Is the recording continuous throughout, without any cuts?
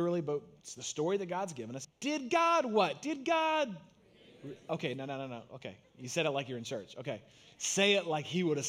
no; 1 cut; at 1.8 s

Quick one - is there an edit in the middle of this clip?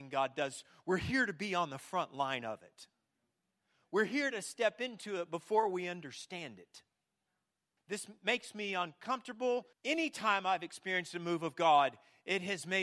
yes; 2 cuts; at 7.8 s, 9.7 s

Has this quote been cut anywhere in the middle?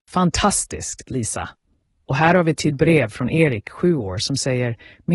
no; 0 cuts

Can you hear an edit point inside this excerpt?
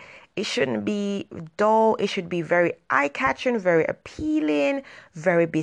no; 0 cuts

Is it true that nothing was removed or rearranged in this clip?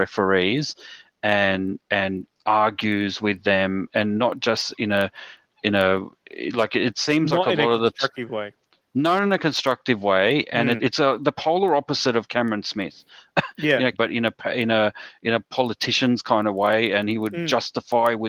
no; 2 cuts; at 10.8 s, 13.9 s

